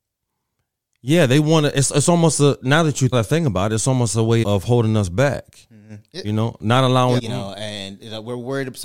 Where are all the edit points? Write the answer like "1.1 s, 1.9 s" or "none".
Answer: 3.1 s, 4.4 s, 7.2 s